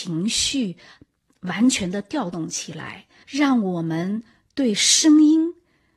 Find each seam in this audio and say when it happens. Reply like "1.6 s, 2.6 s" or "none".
3.2 s